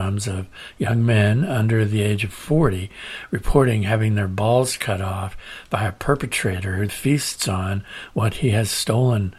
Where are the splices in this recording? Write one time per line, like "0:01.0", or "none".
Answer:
0:06.9